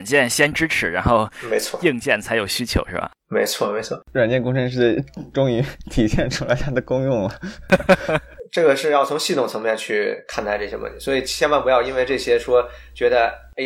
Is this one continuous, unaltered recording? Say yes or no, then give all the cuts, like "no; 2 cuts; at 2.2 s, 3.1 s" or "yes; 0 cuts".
yes; 0 cuts